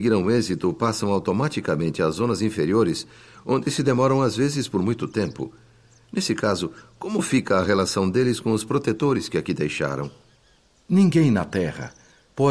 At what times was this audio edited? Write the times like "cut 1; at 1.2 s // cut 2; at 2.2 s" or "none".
none